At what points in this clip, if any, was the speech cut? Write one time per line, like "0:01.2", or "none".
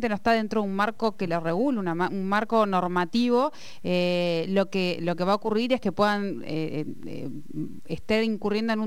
none